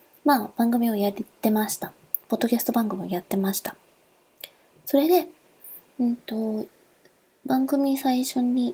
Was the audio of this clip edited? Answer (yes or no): no